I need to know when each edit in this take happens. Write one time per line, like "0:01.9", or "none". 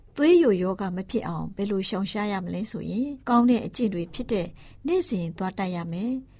0:03.2